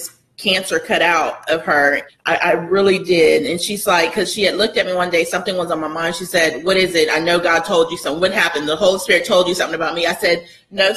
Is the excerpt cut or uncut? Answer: cut